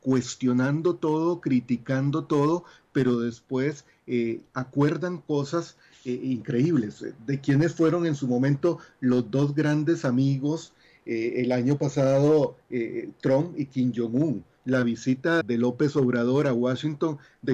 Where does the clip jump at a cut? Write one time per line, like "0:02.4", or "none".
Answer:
0:15.4

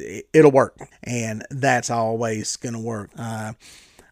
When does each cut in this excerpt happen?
0:00.9
0:03.1

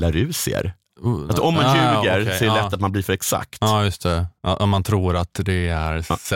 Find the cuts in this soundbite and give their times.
0:01.0
0:04.4

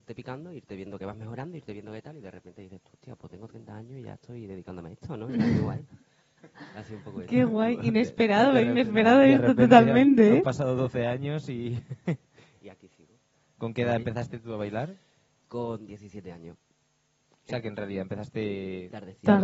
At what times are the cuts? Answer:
none

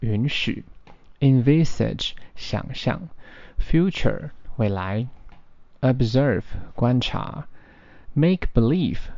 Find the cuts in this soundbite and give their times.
none

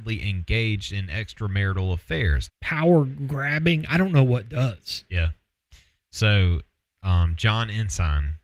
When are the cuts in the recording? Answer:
0:02.5

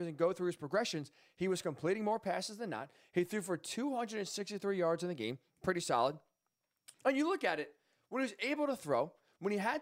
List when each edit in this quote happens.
0:06.9

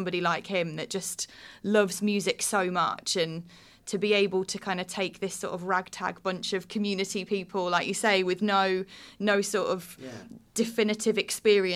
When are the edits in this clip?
none

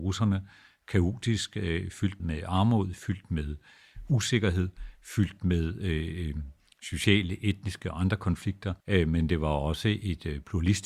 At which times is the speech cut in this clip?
0:02.2
0:08.8

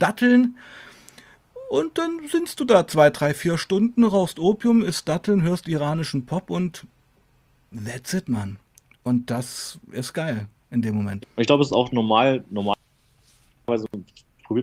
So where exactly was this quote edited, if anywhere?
0:11.2

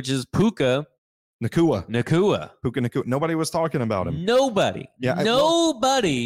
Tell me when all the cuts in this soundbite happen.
none

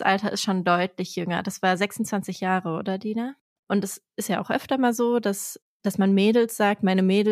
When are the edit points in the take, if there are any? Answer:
0:03.6

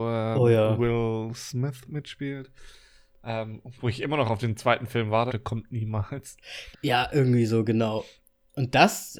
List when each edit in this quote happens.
0:05.3
0:06.7

